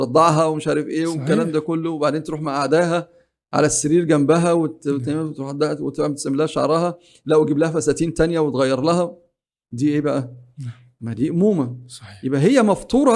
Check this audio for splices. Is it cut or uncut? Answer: uncut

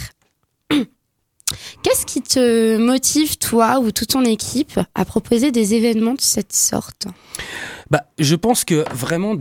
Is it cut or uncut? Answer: uncut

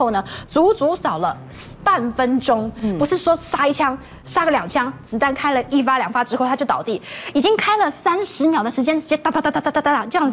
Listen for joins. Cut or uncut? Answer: uncut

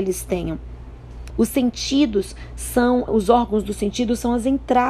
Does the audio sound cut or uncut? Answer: cut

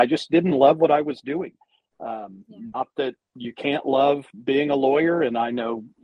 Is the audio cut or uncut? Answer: uncut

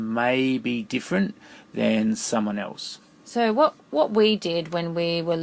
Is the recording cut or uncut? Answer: uncut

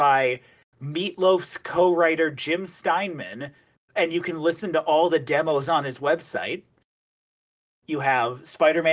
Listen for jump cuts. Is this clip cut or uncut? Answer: uncut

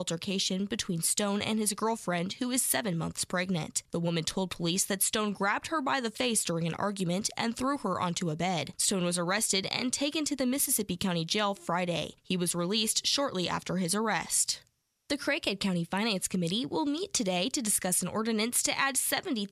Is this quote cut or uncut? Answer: uncut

